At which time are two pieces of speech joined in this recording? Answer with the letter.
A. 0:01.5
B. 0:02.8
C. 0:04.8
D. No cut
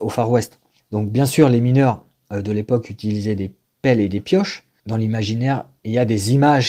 C